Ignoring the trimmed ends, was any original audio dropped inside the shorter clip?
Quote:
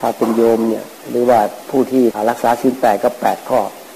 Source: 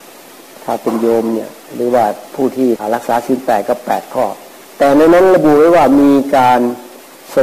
no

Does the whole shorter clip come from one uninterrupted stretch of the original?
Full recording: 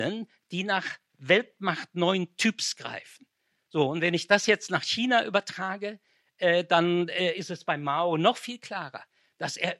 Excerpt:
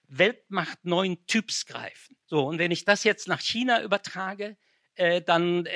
no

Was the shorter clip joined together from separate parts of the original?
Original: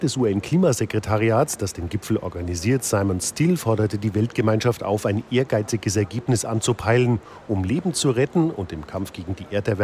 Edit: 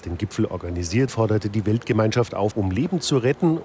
yes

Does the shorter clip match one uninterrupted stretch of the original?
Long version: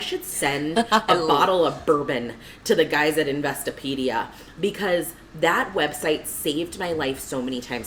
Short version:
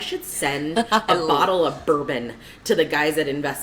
yes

